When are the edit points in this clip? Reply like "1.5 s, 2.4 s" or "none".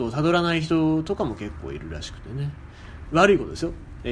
3.1 s